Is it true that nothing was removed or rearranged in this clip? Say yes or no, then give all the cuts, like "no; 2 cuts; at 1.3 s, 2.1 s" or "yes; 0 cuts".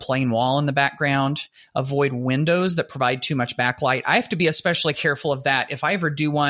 yes; 0 cuts